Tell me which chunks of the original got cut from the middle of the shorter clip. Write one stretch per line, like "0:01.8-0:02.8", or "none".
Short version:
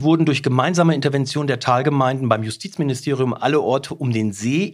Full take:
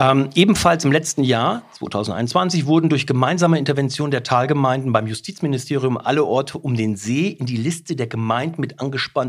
none